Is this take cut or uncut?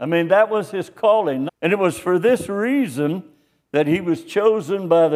cut